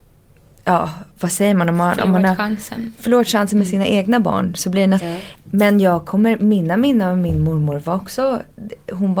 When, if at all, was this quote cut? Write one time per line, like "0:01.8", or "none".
0:05.0